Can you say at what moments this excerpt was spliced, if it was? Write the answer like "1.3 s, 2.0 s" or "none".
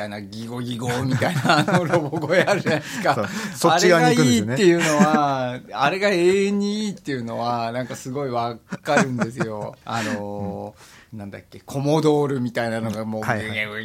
9.8 s